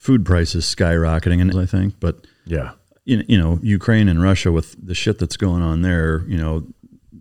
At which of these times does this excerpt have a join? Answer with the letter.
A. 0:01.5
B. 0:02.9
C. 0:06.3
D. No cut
A